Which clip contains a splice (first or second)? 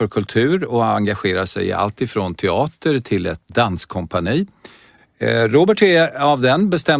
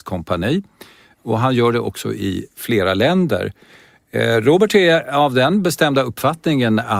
first